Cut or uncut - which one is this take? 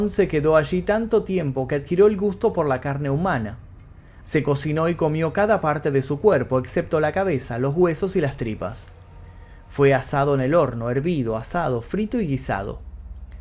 cut